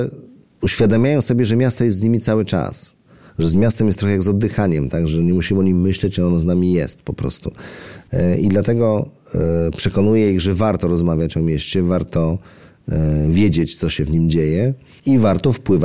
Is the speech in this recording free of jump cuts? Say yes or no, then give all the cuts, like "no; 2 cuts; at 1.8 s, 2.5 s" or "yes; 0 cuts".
yes; 0 cuts